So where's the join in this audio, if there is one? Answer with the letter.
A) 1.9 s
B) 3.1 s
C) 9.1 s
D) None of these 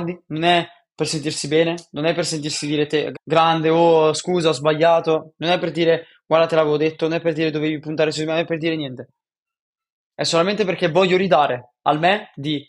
B